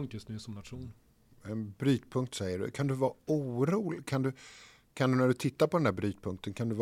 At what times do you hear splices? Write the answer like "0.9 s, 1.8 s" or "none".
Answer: none

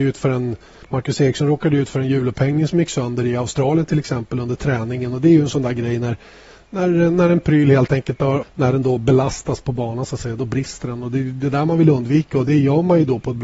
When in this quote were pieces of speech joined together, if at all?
8.4 s

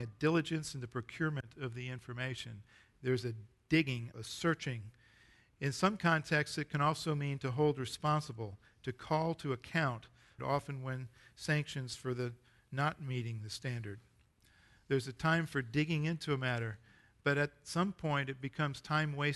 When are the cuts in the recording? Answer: 4.1 s, 10.4 s

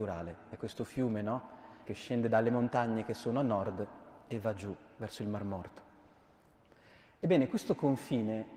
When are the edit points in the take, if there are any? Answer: 1.9 s

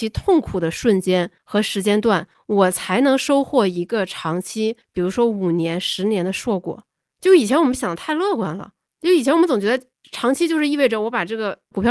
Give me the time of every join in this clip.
none

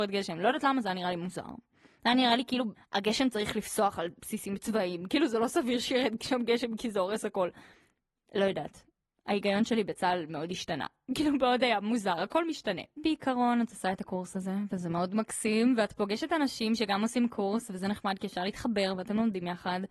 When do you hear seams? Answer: none

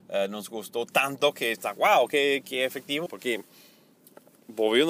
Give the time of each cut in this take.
3.1 s

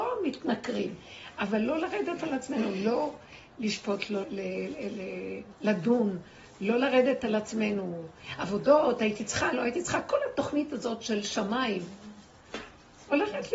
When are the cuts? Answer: 4.2 s

